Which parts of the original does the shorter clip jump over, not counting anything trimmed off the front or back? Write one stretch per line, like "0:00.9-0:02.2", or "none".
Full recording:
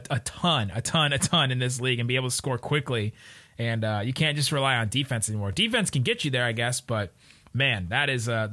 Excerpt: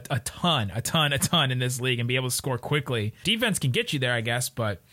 0:03.2-0:05.5